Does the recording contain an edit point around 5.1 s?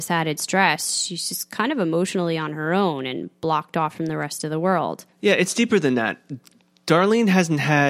yes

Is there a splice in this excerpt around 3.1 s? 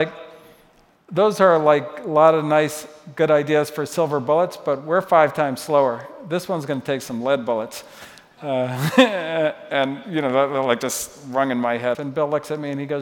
no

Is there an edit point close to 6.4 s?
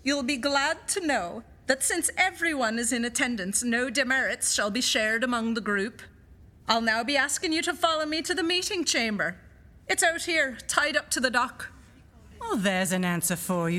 no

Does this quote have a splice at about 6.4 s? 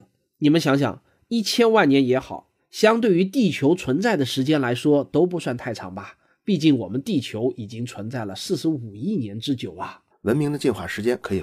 no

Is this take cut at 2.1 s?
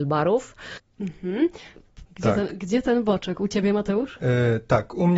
yes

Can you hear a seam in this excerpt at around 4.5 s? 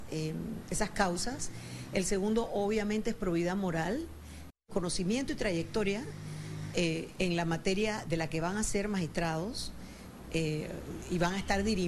yes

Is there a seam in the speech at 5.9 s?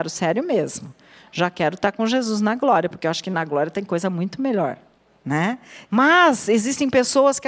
yes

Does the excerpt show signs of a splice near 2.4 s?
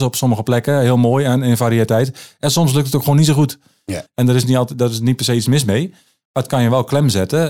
no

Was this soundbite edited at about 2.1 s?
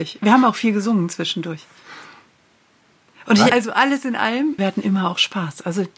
no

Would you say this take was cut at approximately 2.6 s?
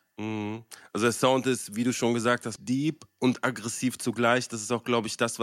yes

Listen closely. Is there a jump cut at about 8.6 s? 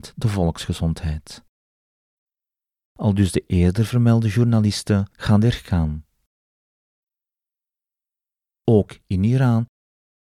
no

